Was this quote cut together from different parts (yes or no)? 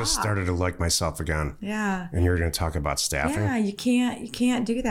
no